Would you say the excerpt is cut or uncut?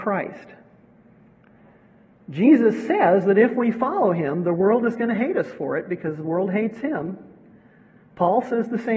uncut